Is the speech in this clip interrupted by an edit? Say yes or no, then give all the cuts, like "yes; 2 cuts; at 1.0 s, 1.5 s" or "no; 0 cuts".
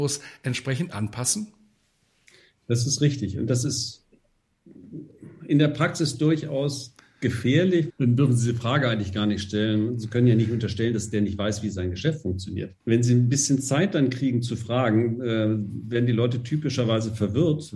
yes; 2 cuts; at 7.9 s, 12.8 s